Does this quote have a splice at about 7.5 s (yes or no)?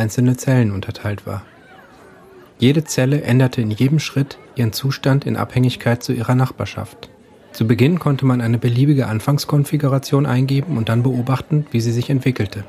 yes